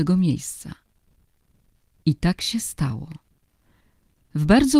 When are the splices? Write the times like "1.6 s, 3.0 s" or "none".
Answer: none